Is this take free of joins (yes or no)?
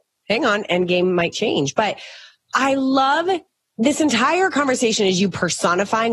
yes